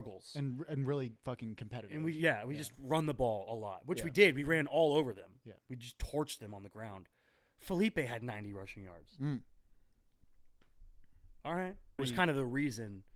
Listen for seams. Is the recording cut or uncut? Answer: cut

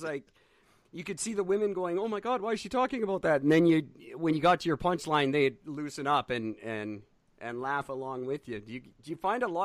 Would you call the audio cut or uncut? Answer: uncut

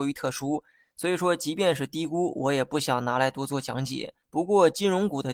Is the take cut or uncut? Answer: cut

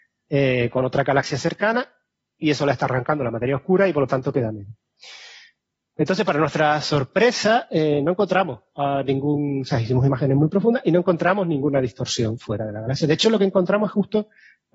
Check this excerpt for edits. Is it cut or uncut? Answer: uncut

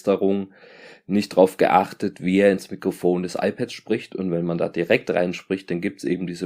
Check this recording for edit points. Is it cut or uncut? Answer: uncut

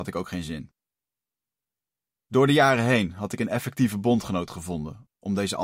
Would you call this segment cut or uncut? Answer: uncut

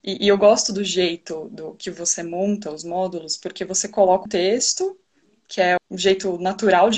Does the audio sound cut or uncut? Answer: cut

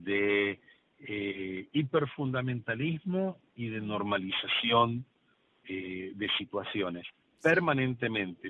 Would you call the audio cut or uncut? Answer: uncut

